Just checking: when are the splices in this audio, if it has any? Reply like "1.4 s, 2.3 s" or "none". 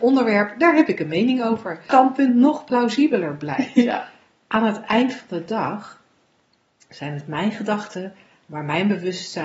1.9 s